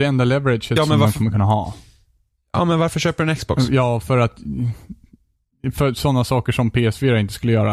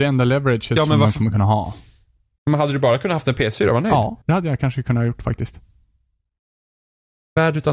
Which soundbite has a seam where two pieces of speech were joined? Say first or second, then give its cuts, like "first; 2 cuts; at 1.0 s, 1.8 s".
second; 2 cuts; at 2.4 s, 4.2 s